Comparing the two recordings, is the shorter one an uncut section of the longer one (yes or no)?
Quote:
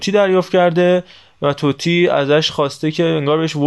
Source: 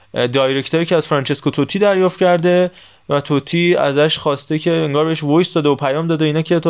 yes